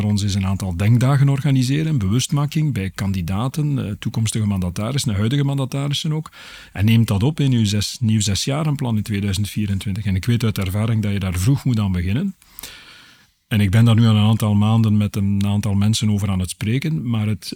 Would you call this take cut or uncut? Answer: uncut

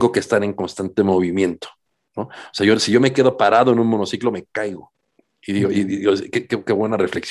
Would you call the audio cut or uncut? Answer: uncut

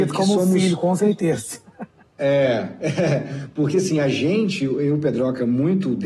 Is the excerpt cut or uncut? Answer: uncut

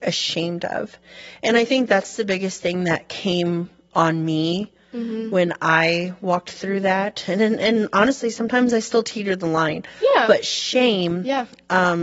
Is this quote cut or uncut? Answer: uncut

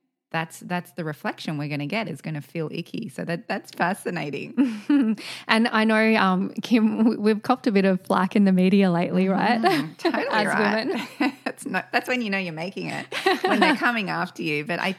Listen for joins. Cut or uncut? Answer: uncut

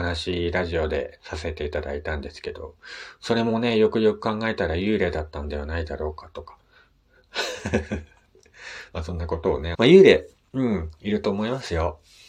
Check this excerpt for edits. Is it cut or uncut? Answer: cut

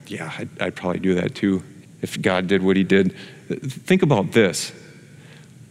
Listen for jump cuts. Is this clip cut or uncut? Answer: cut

